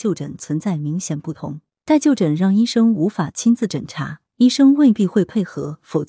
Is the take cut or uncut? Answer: cut